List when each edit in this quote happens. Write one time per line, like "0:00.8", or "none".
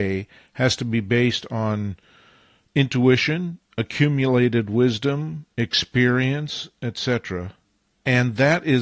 none